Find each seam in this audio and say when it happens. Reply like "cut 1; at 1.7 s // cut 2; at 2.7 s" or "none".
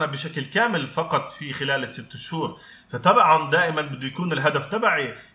none